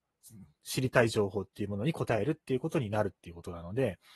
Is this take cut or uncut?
uncut